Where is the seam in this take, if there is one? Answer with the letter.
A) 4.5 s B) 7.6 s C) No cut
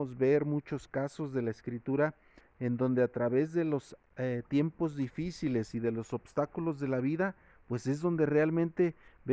C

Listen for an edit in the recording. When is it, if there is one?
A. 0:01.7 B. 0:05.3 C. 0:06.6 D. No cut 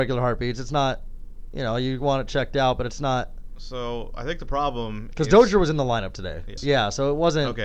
C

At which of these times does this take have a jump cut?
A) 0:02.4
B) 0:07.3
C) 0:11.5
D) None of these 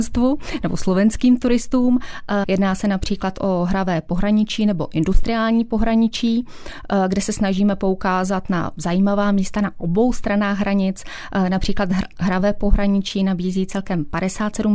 A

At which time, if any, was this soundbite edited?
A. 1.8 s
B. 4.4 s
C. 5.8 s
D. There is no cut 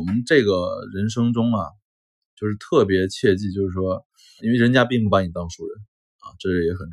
B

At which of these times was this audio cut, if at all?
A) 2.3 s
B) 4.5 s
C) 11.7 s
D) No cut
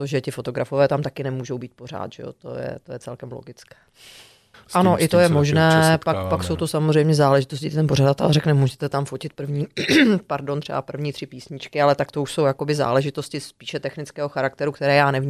B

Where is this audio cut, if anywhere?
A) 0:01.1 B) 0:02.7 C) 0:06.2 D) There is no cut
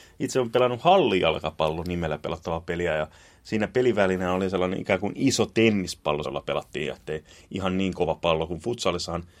C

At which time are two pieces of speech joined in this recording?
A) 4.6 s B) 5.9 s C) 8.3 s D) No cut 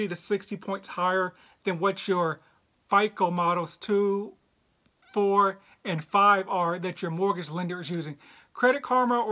D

